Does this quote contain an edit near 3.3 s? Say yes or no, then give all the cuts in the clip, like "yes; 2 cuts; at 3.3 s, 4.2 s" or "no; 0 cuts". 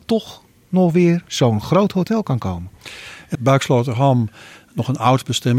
yes; 1 cut; at 3.3 s